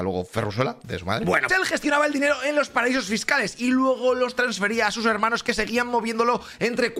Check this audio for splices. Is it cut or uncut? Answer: cut